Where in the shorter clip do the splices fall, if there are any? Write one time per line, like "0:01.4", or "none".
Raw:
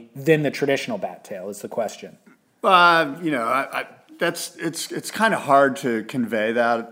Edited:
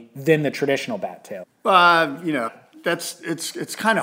0:01.4
0:02.5

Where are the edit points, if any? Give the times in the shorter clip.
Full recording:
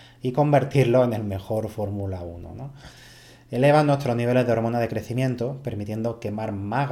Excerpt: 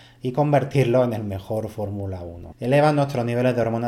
0:02.5

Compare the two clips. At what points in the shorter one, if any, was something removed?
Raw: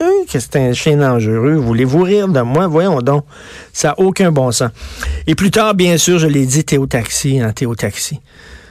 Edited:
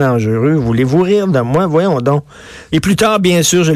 0:02.7

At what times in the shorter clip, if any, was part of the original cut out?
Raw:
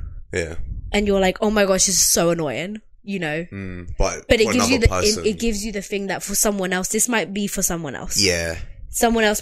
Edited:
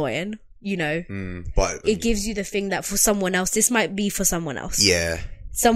0:01.8

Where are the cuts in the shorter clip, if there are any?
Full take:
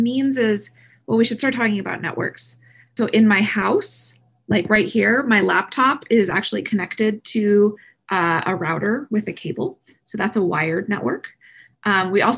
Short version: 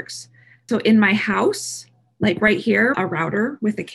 0:02.9

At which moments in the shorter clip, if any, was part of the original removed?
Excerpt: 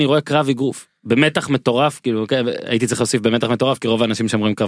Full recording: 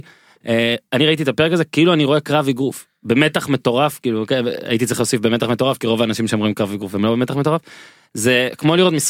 none

